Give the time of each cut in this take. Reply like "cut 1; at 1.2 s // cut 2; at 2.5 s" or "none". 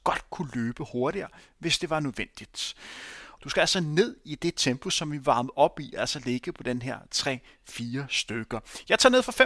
cut 1; at 3.4 s